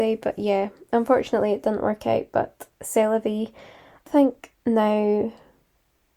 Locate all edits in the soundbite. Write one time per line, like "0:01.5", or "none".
0:04.1